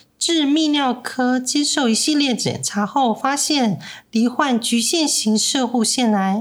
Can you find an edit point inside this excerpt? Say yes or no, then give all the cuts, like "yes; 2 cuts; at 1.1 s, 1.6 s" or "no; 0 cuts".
no; 0 cuts